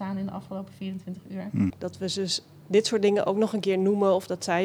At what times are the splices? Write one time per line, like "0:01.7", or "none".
0:01.7

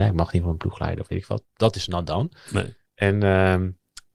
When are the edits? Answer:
0:02.9

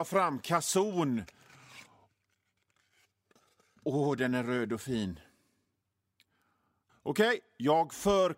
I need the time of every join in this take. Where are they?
0:06.9

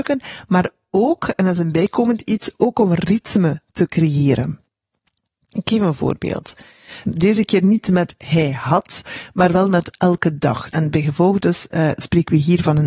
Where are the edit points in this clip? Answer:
0:07.0
0:10.7

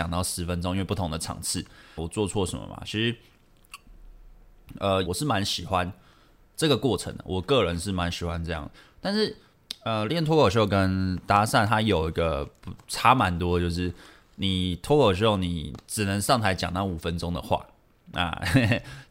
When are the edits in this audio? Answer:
0:02.0
0:05.1

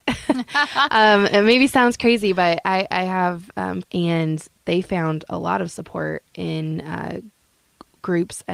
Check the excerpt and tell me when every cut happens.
0:03.8

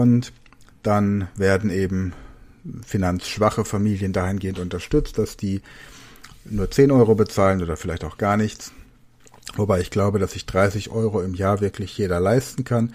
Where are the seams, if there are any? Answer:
none

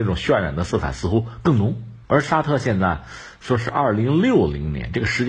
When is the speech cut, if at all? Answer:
0:02.0

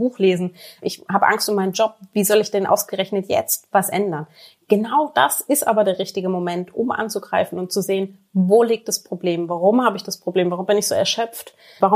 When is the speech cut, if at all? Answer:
none

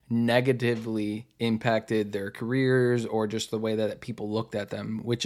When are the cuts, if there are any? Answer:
none

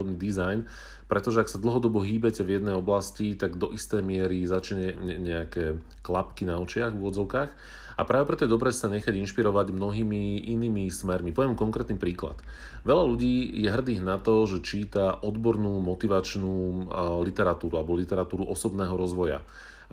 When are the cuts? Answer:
0:04.9

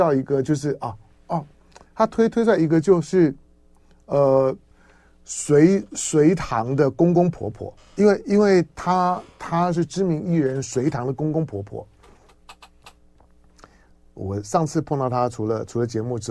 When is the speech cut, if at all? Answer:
none

